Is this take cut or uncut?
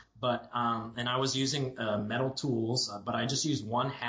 uncut